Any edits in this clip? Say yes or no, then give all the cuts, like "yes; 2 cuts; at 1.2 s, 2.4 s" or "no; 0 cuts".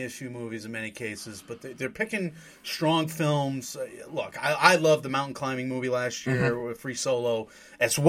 no; 0 cuts